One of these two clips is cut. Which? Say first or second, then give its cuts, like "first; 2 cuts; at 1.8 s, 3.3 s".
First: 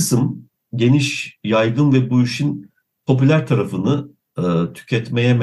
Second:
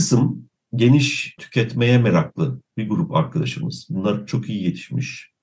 second; 1 cut; at 1.4 s